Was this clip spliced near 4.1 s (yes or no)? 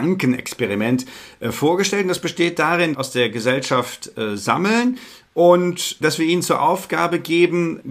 no